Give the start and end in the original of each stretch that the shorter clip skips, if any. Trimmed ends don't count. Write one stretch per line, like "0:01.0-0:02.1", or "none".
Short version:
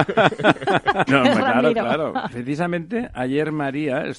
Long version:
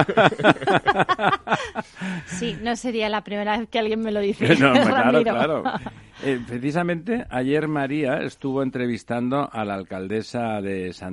0:01.1-0:04.6
0:05.8-0:06.5